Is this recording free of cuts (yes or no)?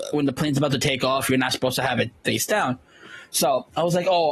yes